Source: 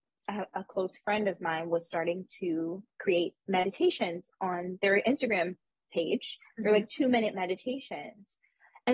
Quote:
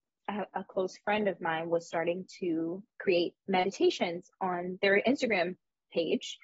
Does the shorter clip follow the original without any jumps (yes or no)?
yes